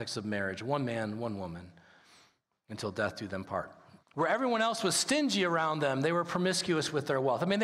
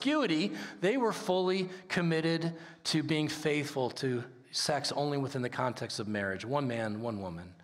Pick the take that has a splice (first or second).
first